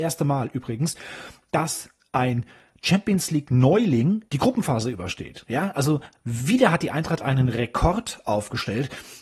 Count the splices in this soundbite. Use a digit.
1